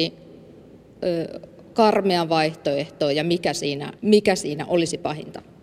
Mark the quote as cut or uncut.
cut